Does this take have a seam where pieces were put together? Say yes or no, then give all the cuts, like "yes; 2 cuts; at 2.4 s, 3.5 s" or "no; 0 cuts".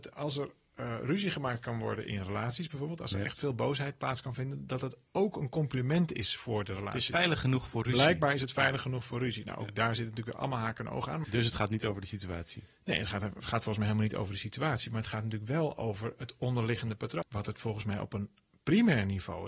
yes; 2 cuts; at 11.2 s, 17.2 s